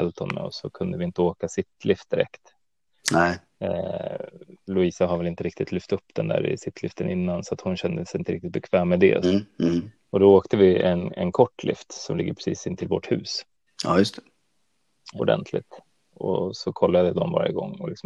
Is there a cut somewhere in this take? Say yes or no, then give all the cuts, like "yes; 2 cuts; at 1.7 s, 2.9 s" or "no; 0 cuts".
yes; 2 cuts; at 9.2 s, 15.2 s